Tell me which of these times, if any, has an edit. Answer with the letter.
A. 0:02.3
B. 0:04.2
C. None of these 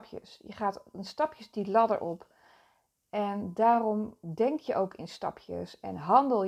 C